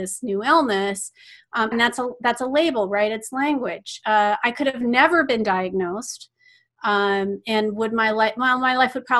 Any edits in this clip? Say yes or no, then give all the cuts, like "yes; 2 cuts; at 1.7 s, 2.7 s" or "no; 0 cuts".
yes; 1 cut; at 1.7 s